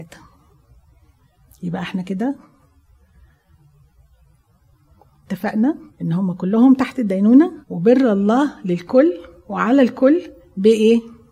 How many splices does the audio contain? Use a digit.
2